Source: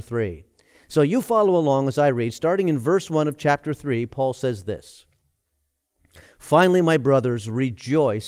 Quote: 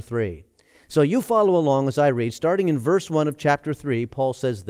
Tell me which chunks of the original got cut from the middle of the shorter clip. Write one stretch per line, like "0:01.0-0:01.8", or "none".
none